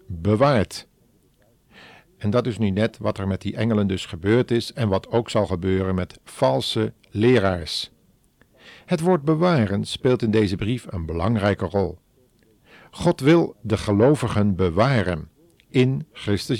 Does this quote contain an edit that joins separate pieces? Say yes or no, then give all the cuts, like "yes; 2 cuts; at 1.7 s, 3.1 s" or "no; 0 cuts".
no; 0 cuts